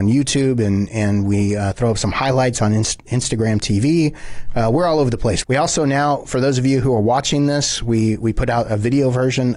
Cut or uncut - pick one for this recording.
cut